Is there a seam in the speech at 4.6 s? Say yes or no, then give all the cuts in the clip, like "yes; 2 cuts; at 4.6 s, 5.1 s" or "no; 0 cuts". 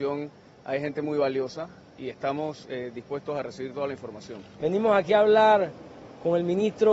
yes; 2 cuts; at 2.0 s, 4.6 s